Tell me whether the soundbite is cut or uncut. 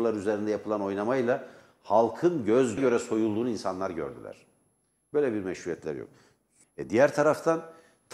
cut